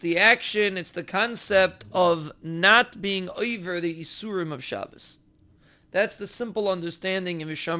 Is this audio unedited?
yes; 0 cuts

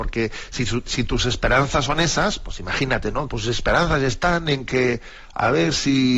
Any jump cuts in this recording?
yes; 1 cut; at 3.3 s

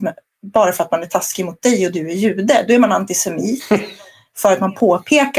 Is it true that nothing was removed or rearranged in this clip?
yes; 0 cuts

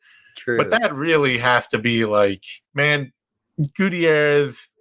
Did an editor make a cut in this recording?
yes; 1 cut; at 2.6 s

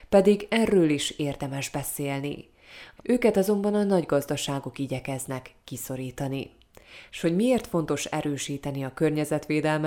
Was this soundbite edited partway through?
yes; 1 cut; at 3.0 s

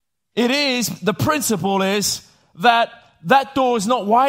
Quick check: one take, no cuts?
yes; 0 cuts

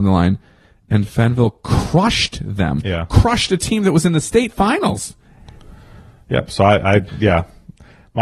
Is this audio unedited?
yes; 0 cuts

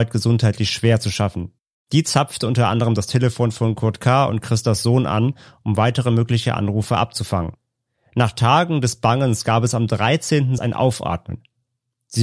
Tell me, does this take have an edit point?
yes; 2 cuts; at 1.7 s, 10.6 s

